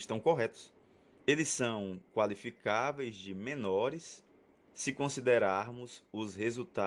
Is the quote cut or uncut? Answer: cut